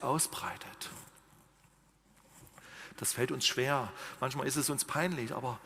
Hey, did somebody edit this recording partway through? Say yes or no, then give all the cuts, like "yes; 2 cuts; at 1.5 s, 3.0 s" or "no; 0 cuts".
yes; 1 cut; at 3.0 s